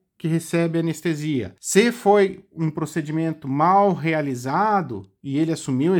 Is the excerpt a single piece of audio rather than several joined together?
no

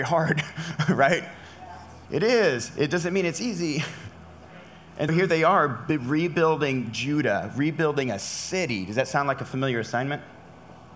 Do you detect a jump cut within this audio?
yes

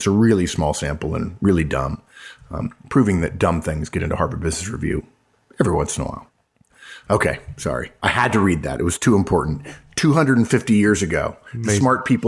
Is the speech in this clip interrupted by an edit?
no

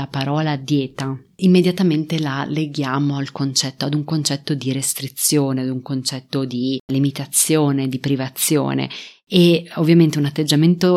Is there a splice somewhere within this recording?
no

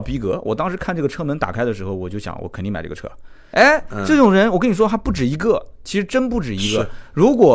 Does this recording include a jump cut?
no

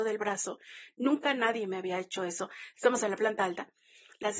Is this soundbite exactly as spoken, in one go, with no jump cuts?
no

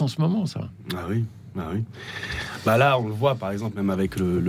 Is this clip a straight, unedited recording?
yes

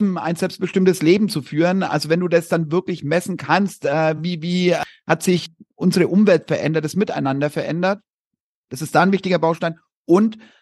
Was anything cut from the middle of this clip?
no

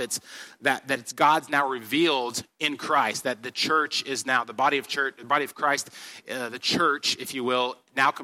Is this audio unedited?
yes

